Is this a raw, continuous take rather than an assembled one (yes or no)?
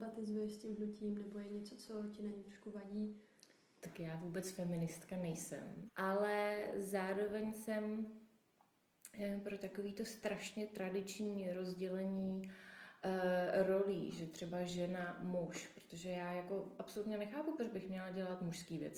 no